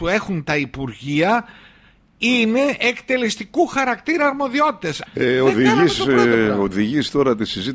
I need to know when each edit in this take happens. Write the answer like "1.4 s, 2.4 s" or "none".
5.1 s